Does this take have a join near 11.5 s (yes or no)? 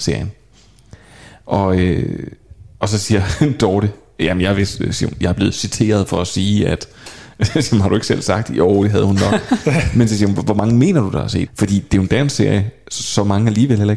yes